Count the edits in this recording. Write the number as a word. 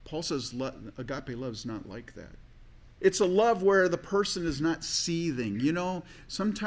one